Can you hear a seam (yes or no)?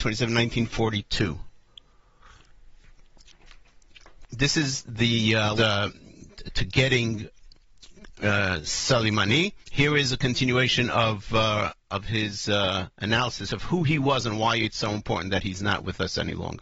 yes